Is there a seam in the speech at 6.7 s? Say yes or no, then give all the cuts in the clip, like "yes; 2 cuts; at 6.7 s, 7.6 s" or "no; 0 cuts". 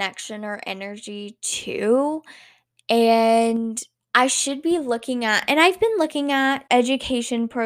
yes; 1 cut; at 6.7 s